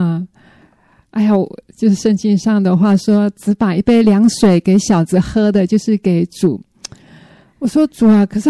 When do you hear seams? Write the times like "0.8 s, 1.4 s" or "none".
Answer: none